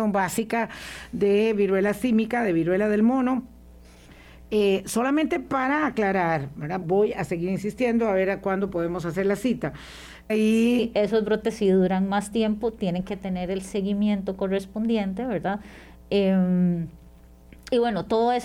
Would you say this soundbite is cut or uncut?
cut